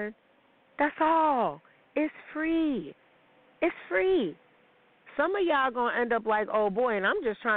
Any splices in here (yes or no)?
no